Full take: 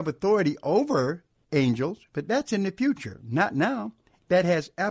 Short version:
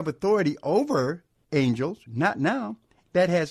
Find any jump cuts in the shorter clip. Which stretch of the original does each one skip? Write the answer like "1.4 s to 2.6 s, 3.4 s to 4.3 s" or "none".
2.1 s to 3.2 s